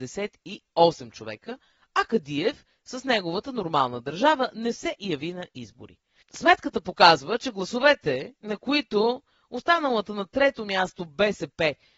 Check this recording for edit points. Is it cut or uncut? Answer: uncut